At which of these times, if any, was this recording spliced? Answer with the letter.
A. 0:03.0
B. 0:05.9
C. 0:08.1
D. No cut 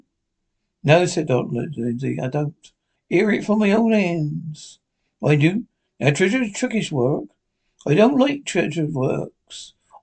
A